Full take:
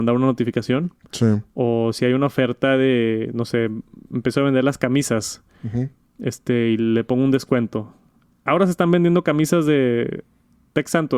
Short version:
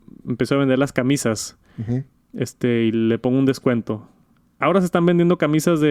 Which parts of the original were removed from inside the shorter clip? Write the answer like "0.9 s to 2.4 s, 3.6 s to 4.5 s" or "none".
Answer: none